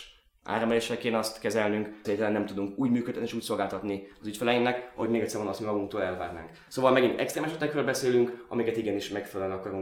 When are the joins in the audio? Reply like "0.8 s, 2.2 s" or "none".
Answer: 2.0 s